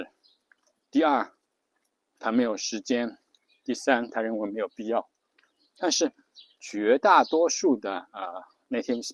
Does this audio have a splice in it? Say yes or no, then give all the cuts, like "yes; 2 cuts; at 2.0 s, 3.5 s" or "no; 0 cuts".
yes; 1 cut; at 5.8 s